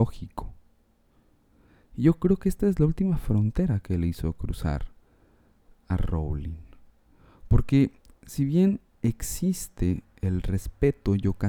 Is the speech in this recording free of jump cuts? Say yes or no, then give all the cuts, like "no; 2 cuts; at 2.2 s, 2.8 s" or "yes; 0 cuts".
yes; 0 cuts